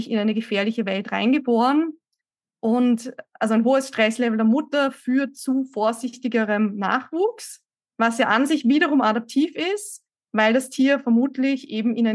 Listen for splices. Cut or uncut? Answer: uncut